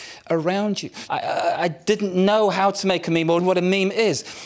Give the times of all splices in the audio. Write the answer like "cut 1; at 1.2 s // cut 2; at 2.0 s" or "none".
cut 1; at 1.1 s // cut 2; at 3.4 s